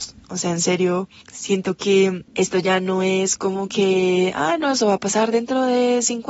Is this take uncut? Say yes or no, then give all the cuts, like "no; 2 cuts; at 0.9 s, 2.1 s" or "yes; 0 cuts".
no; 1 cut; at 2.3 s